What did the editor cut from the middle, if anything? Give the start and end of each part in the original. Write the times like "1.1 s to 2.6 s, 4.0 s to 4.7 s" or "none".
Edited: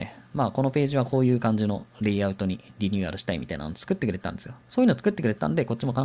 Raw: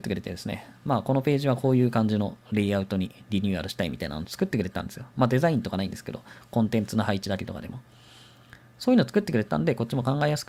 5.1 s to 8.7 s